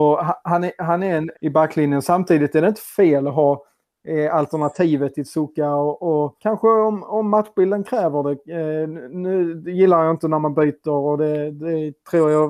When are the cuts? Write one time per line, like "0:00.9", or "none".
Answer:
0:01.3
0:06.4